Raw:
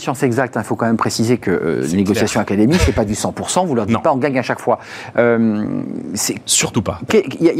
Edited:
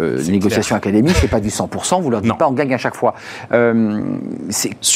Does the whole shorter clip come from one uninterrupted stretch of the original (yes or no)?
yes